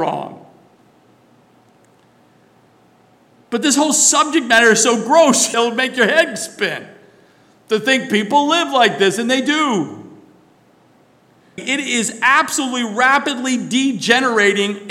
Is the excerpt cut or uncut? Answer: cut